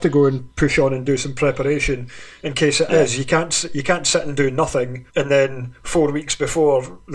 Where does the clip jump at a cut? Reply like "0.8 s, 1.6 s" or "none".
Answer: 5.1 s